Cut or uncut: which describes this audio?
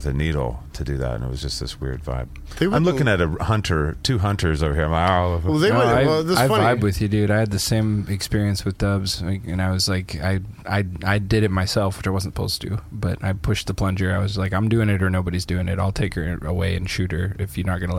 uncut